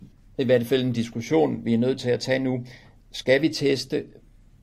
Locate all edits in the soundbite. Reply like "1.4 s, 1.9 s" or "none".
none